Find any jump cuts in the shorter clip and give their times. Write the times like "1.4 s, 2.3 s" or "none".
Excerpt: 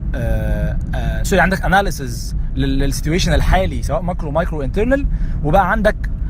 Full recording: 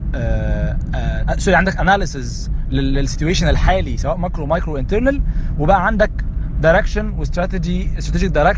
1.2 s